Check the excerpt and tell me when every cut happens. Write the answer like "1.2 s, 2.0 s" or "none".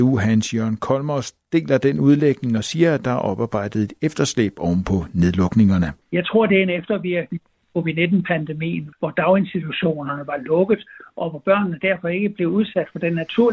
6.0 s, 8.9 s